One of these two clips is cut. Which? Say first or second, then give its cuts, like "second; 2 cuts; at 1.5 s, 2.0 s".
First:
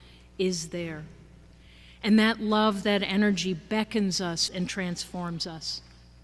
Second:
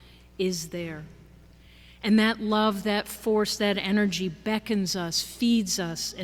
first; 2 cuts; at 2.8 s, 4.5 s